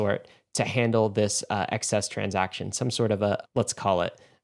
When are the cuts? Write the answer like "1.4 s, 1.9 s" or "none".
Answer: 3.4 s